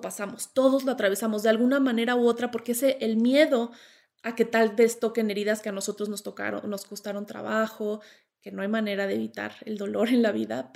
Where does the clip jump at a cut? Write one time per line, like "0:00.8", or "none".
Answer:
none